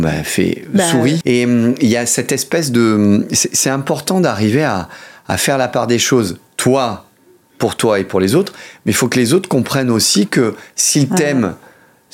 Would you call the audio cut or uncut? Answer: cut